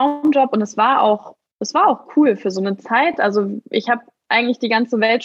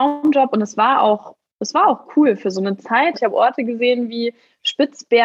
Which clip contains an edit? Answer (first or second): second